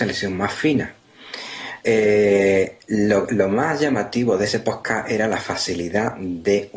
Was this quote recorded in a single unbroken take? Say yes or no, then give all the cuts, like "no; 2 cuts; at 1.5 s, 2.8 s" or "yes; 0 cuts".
no; 1 cut; at 1.8 s